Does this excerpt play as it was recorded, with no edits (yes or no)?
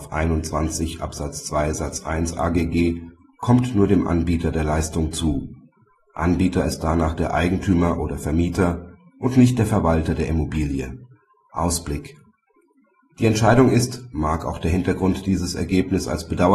no